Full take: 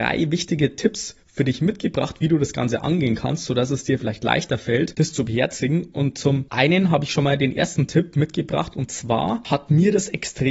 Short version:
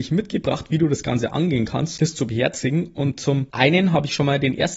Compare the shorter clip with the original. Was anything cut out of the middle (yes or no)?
yes